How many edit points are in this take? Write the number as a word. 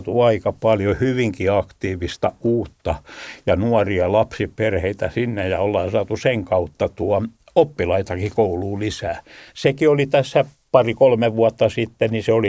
one